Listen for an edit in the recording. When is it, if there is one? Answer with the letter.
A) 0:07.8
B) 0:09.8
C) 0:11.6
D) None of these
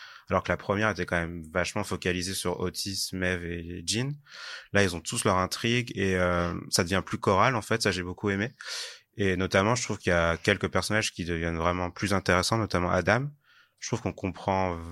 D